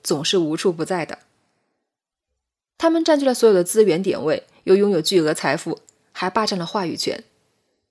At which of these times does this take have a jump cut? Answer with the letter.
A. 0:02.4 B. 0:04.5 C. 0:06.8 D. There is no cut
D